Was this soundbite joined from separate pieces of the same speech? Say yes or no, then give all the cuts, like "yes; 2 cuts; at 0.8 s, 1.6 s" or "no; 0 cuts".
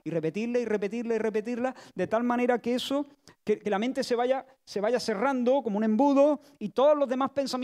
no; 0 cuts